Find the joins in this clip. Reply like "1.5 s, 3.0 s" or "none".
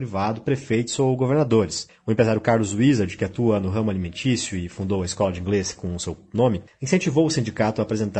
none